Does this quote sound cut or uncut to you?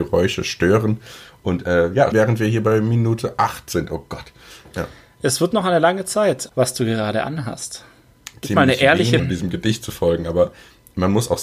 cut